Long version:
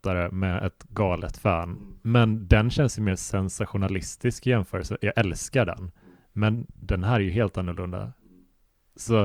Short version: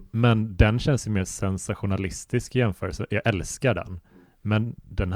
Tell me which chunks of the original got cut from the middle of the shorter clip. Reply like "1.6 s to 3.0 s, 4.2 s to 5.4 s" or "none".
none